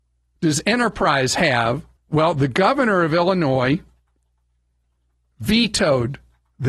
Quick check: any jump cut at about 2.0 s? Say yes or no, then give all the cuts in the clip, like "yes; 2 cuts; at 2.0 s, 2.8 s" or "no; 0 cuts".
yes; 1 cut; at 2.0 s